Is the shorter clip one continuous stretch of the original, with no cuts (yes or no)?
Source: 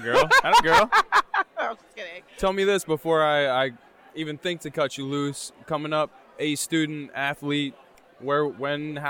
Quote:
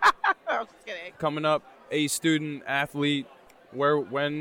no